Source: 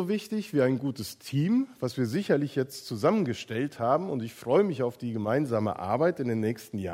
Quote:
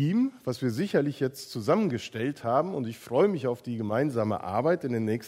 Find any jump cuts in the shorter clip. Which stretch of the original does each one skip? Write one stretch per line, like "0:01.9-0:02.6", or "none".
none